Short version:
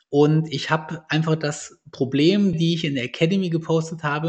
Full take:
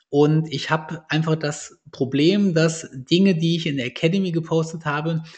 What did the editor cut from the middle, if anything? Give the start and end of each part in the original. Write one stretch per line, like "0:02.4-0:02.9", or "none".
0:02.5-0:03.4